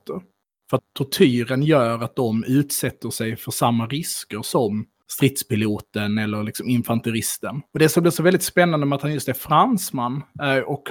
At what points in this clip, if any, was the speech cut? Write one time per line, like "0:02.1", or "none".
0:07.7